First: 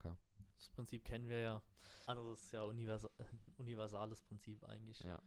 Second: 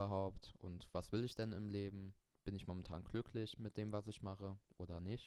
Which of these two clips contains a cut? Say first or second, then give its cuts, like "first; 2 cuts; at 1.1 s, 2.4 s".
first; 1 cut; at 2.1 s